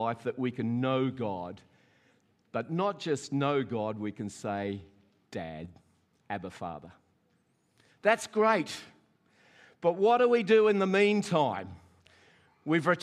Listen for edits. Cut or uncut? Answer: uncut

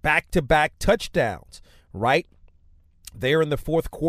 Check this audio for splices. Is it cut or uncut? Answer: uncut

